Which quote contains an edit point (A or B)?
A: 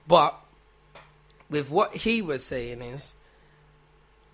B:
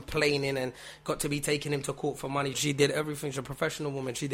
B